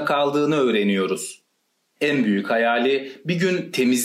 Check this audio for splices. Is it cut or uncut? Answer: cut